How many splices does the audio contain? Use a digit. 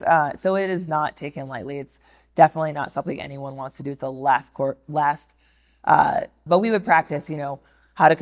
1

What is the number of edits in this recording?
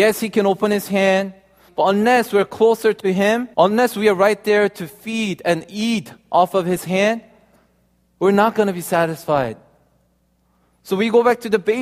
2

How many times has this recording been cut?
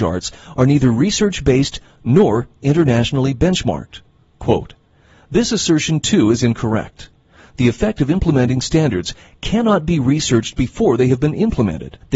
0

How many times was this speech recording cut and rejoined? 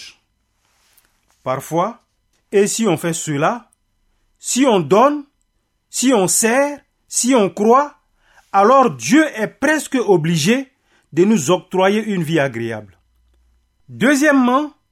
2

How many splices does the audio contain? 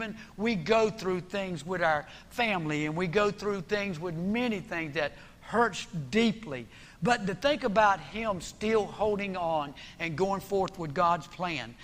0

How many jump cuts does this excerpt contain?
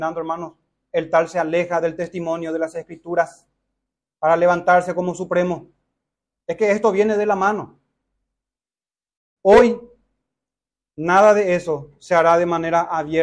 1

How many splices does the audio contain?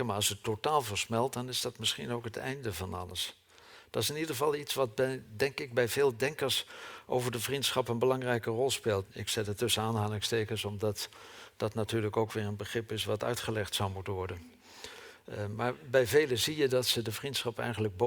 1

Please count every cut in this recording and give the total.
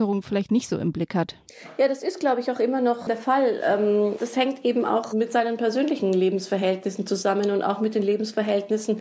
2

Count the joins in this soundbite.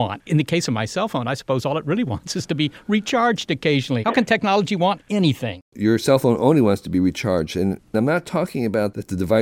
1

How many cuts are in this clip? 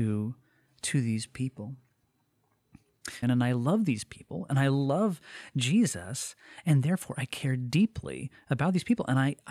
1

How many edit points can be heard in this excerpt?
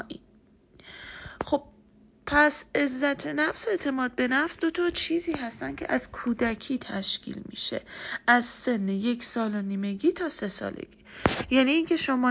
0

